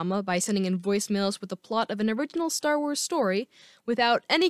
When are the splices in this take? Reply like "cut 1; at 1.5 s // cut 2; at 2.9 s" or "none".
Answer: none